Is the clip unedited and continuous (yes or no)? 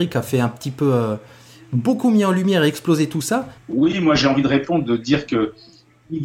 no